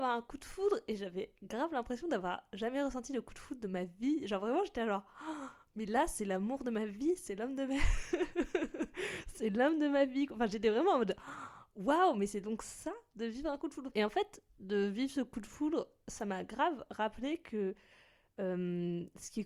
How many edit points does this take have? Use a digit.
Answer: 1